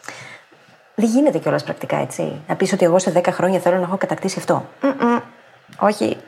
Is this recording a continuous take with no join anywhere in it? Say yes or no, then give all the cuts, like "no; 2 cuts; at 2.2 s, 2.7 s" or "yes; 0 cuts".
yes; 0 cuts